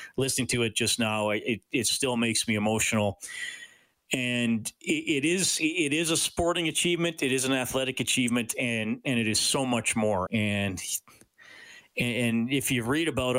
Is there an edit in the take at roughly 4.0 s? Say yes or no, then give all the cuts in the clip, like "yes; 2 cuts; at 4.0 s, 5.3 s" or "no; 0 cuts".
no; 1 cut; at 10.3 s